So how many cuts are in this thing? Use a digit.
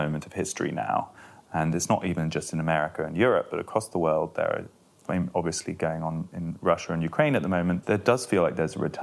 1